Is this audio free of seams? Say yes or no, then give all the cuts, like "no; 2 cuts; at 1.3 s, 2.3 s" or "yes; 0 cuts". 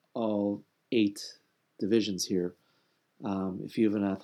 yes; 0 cuts